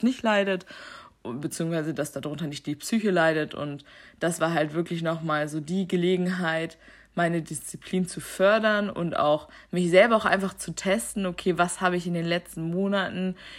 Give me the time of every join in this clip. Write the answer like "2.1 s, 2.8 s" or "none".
none